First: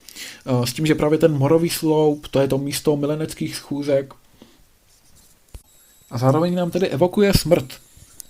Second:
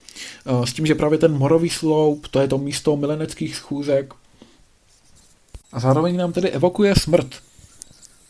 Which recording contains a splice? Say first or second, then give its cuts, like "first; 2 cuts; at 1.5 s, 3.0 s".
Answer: second; 1 cut; at 5.6 s